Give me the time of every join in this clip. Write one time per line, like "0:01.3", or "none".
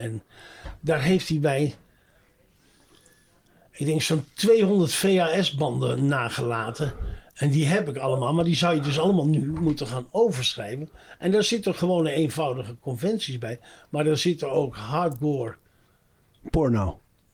none